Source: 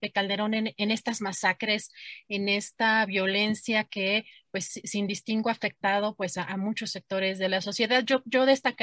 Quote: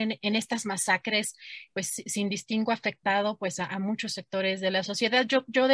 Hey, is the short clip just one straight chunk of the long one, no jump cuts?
no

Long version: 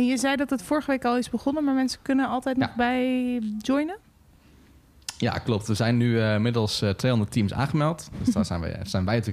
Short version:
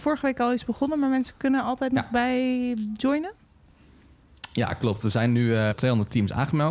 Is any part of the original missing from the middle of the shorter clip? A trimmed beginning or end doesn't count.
yes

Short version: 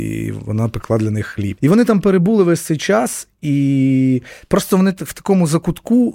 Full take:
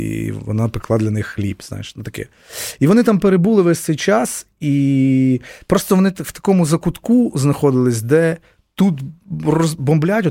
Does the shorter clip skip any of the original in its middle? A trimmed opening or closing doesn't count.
yes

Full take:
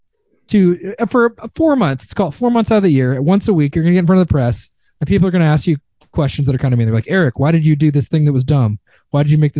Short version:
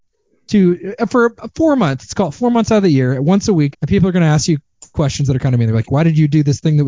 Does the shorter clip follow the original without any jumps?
no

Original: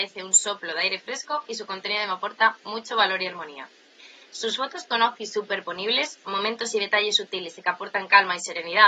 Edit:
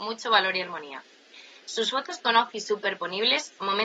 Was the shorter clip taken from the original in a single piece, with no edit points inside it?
yes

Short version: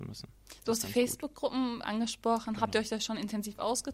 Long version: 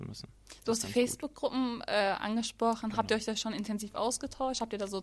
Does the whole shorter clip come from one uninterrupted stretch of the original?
no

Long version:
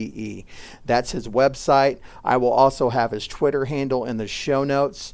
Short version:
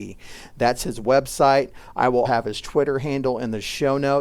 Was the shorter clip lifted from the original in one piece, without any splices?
no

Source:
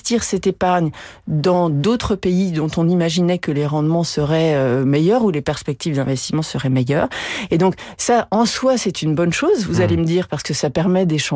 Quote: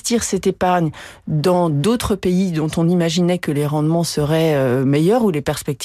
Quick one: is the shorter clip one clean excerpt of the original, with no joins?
yes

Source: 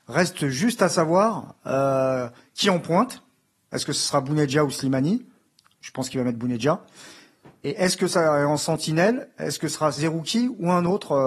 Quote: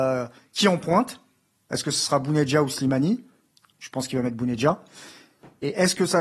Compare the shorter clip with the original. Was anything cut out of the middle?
no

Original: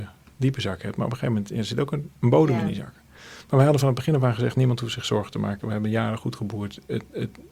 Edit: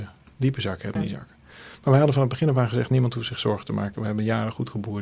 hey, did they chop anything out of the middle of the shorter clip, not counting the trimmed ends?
yes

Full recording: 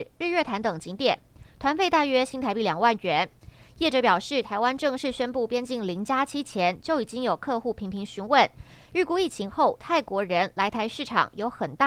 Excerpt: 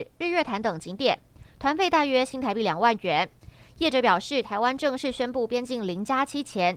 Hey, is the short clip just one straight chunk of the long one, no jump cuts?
yes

